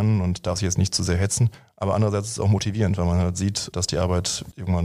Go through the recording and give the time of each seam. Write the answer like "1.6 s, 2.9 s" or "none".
none